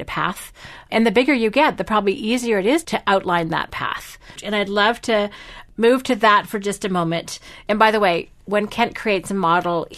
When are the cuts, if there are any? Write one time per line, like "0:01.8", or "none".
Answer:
0:04.4